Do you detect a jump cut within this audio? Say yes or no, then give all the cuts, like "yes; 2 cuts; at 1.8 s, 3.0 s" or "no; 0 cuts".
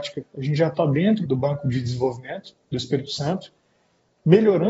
yes; 1 cut; at 1.2 s